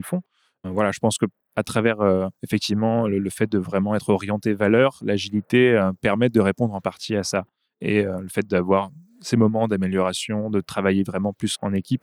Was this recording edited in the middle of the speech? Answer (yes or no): no